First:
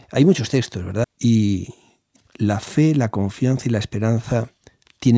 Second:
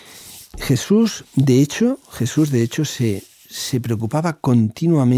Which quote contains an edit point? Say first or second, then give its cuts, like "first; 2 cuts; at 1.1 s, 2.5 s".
first; 2 cuts; at 1.0 s, 2.2 s